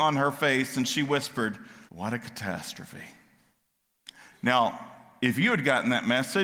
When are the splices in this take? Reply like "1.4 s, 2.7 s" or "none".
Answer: 1.9 s